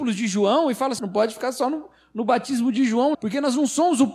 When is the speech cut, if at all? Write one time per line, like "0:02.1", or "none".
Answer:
0:01.0
0:03.1